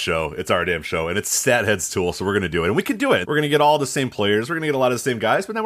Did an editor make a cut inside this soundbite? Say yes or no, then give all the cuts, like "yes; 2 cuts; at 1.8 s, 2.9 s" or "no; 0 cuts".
yes; 1 cut; at 3.2 s